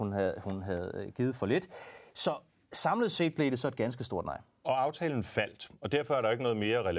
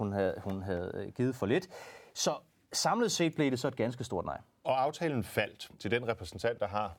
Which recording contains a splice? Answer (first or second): second